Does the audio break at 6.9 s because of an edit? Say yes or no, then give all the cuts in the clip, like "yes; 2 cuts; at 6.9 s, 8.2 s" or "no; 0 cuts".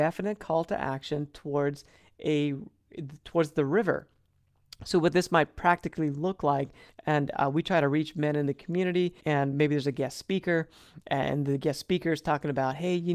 yes; 2 cuts; at 6.9 s, 9.2 s